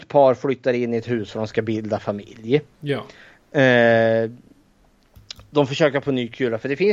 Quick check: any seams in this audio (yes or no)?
no